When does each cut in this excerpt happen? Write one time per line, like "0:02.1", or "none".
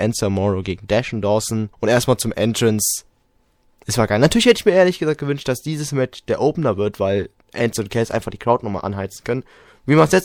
0:01.7

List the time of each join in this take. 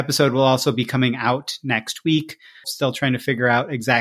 0:02.6

